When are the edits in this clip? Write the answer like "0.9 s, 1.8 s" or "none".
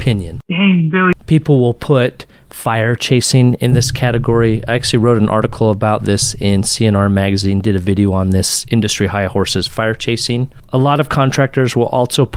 none